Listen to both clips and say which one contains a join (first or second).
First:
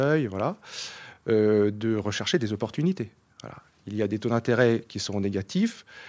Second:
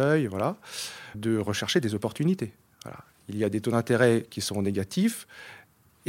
second